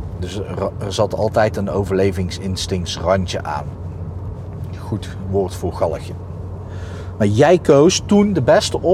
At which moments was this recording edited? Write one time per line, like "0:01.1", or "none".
none